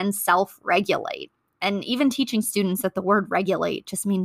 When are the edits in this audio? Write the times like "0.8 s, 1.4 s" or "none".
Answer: none